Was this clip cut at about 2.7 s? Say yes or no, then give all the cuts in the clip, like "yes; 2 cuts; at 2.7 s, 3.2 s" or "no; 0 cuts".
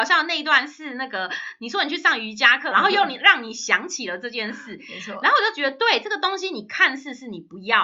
yes; 1 cut; at 2.7 s